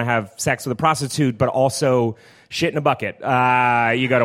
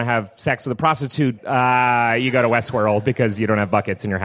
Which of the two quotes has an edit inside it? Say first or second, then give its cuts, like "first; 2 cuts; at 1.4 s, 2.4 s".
second; 1 cut; at 1.4 s